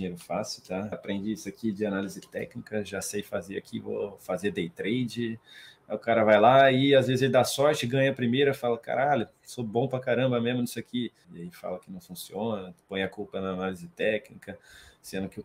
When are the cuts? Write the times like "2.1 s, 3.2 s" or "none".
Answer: 0.9 s, 11.2 s